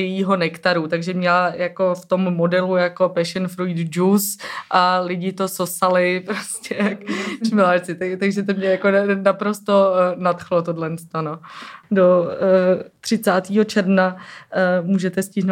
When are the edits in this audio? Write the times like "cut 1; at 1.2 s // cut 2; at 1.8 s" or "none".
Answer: none